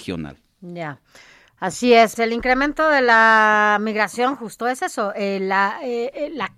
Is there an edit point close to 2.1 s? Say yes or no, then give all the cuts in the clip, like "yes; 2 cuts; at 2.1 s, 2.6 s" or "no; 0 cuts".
yes; 1 cut; at 2.1 s